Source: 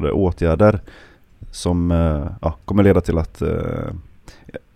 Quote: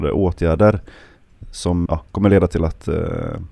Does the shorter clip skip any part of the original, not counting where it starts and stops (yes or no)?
yes